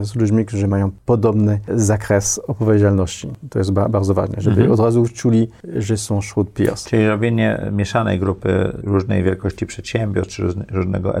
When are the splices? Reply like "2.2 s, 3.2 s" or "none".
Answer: none